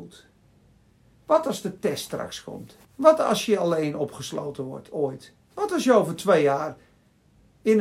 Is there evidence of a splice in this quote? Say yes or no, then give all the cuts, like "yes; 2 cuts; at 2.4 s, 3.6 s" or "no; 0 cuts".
yes; 2 cuts; at 2.8 s, 5.4 s